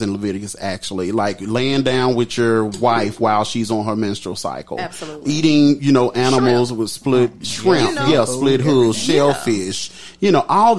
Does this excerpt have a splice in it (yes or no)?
no